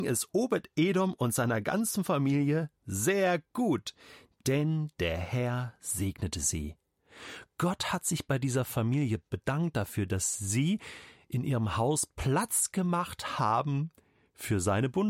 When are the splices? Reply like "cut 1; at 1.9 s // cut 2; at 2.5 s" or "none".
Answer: none